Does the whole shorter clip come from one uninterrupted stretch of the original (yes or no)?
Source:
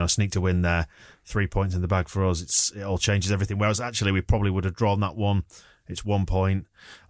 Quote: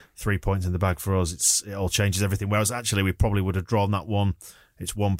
yes